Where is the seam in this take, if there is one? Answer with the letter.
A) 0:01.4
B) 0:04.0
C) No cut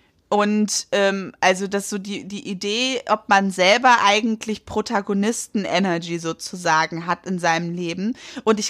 C